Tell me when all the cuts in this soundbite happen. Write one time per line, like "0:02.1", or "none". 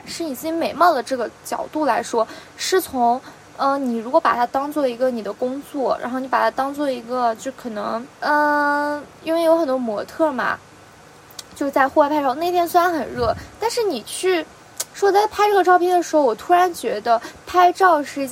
0:08.1
0:14.9